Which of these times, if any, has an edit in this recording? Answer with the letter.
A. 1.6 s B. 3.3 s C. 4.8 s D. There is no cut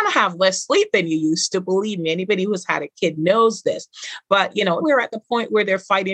C